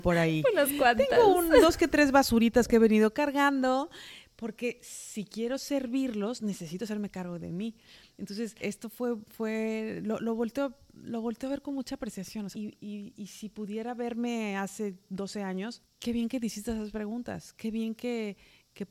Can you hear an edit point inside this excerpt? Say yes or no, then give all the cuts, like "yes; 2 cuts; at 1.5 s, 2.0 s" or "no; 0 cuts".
yes; 3 cuts; at 8.6 s, 12.5 s, 15.8 s